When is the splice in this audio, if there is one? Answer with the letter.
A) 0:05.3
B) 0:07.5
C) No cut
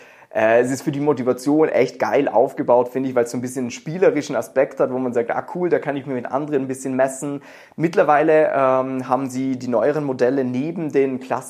C